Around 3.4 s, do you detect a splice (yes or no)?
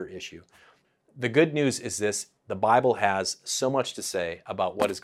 no